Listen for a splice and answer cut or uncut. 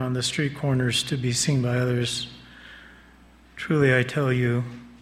uncut